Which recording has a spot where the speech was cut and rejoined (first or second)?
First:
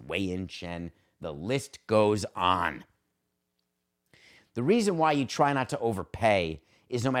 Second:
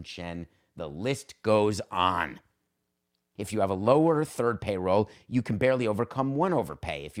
second